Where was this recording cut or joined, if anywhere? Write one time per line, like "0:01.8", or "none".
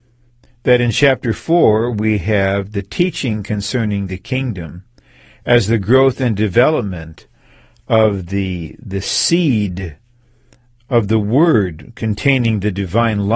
none